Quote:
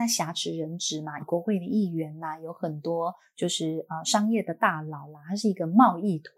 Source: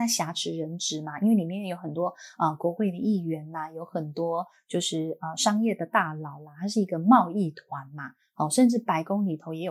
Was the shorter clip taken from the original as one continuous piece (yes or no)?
no